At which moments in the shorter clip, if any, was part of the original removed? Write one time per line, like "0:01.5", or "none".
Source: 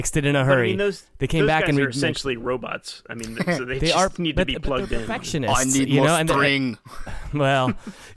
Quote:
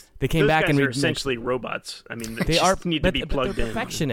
0:02.5